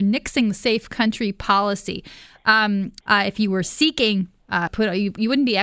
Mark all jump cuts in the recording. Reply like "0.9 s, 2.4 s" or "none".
3.0 s, 4.7 s